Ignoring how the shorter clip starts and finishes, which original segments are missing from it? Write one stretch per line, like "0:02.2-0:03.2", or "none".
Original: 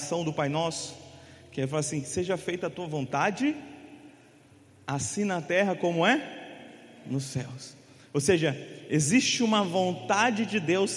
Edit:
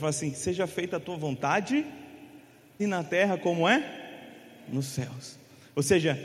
0:04.5-0:05.2

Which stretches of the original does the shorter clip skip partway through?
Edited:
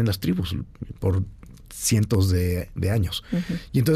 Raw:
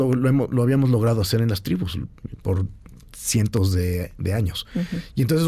none

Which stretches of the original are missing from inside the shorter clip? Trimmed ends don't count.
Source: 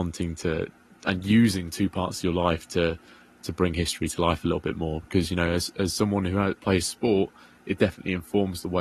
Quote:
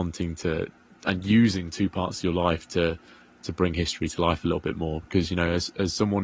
none

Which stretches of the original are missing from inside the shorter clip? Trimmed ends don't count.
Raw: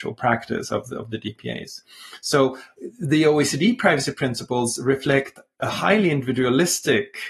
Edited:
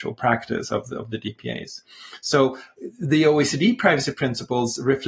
none

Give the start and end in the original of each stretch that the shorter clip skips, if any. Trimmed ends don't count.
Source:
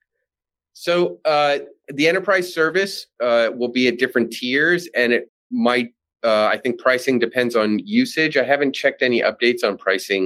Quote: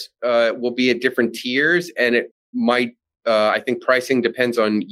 none

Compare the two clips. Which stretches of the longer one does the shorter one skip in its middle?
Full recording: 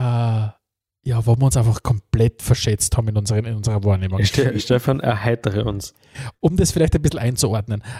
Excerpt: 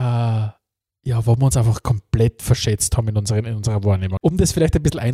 0:04.2-0:06.4

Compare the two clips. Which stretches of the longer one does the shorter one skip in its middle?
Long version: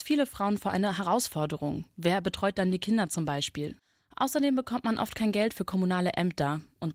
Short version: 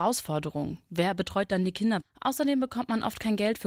0:03.1-0:04.0

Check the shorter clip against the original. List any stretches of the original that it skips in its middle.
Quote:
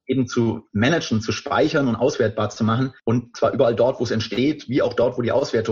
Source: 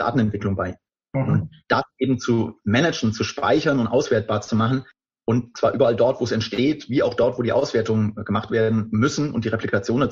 0:04.9-0:05.2

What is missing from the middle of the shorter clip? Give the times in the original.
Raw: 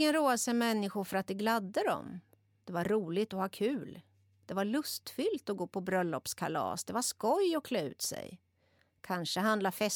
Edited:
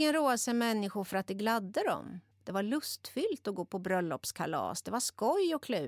0:02.3-0:04.3

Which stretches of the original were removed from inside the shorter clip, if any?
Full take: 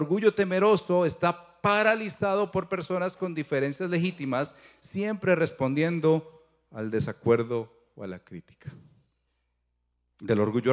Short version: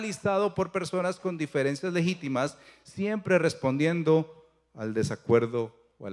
none

